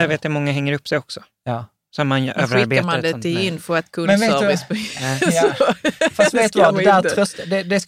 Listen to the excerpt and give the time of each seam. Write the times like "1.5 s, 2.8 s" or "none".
none